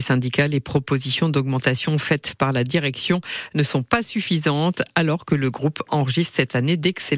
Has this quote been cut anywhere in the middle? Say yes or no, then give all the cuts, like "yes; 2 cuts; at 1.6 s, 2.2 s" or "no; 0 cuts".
no; 0 cuts